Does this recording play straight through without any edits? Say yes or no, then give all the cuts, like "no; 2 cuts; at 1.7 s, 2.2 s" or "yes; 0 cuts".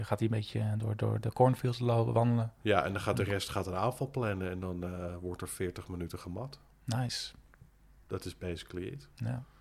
yes; 0 cuts